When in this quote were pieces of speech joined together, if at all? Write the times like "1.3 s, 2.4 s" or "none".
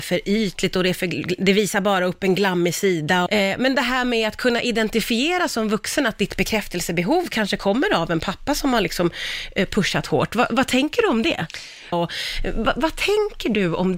3.3 s, 11.9 s